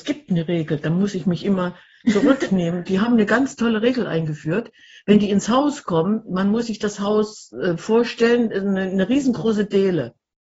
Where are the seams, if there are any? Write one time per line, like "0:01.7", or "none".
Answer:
none